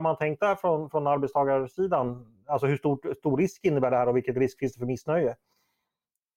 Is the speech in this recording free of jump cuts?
yes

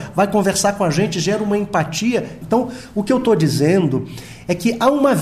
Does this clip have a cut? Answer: yes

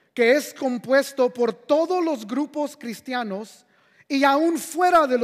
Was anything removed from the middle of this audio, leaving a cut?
no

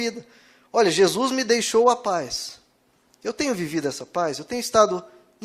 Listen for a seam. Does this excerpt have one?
no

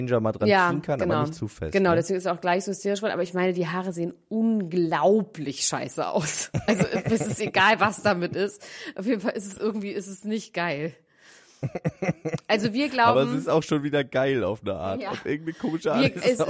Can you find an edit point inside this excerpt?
no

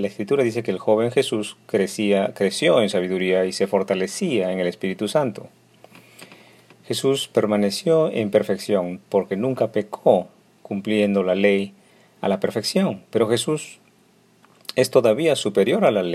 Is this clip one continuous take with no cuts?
yes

